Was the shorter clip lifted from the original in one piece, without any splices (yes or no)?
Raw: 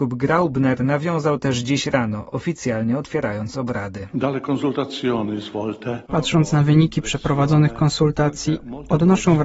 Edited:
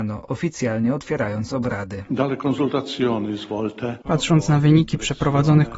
yes